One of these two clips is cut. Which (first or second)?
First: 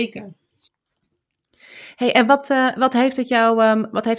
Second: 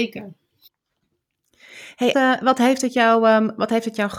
second